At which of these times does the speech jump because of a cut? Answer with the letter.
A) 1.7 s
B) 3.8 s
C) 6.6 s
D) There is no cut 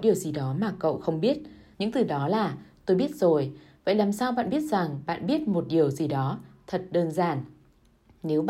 A